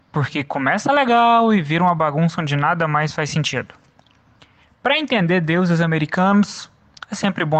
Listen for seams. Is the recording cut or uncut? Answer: uncut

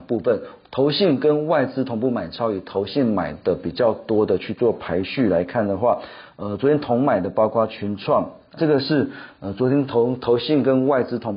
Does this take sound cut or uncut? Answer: cut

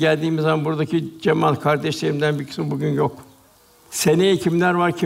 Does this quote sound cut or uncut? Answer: uncut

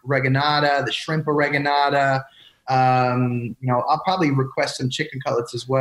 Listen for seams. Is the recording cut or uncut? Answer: uncut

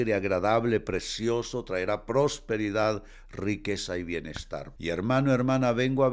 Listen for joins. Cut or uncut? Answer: cut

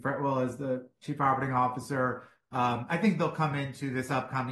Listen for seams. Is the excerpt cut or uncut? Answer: uncut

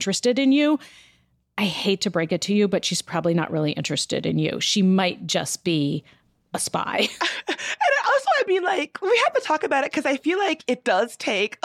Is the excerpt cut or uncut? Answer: uncut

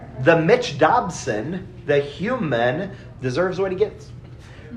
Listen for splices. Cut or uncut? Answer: cut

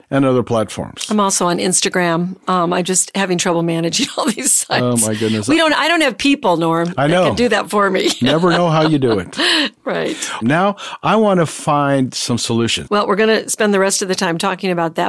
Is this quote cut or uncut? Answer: cut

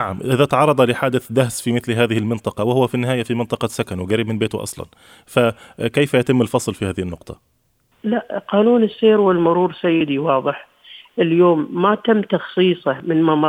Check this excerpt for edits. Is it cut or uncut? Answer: uncut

